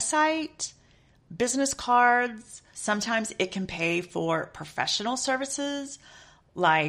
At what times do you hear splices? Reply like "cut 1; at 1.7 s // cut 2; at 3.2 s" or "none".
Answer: cut 1; at 2.7 s